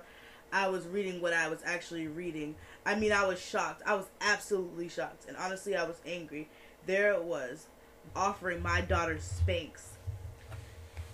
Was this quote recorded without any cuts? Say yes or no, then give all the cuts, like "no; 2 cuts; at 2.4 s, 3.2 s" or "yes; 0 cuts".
no; 1 cut; at 8.1 s